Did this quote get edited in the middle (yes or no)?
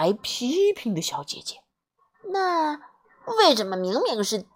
yes